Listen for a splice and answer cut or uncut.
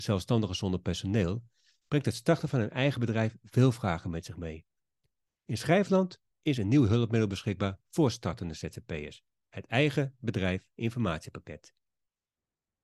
uncut